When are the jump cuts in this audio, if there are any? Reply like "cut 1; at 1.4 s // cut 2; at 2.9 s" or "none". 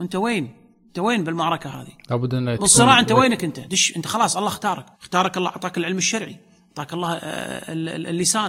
cut 1; at 3.7 s // cut 2; at 4.9 s